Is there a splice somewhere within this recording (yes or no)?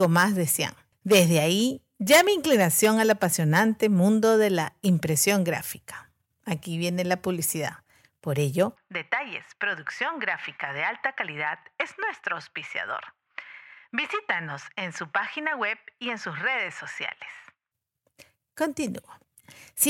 no